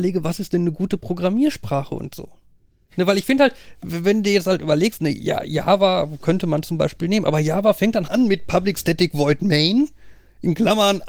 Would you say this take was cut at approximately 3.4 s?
no; 1 cut; at 8.1 s

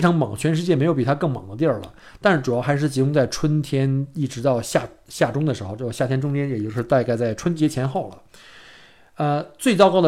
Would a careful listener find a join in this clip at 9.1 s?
no; 0 cuts

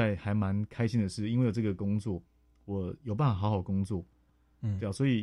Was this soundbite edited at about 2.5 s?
no; 1 cut; at 4.3 s

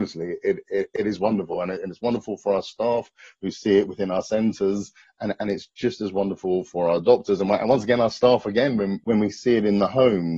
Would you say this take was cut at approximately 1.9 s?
no; 0 cuts

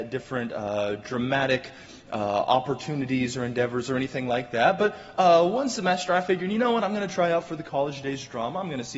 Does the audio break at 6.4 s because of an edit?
no; 0 cuts

